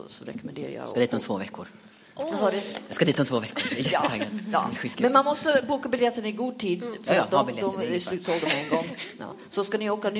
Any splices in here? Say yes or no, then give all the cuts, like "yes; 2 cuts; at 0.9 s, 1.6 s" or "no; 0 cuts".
no; 0 cuts